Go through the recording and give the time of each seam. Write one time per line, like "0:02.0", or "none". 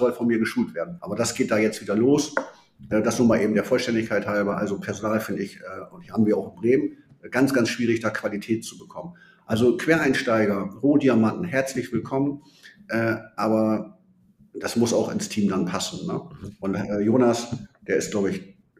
0:01.0